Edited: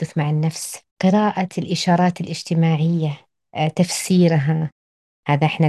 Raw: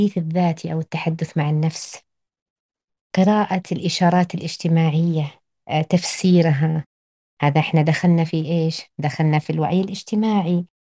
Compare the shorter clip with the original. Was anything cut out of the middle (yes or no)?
yes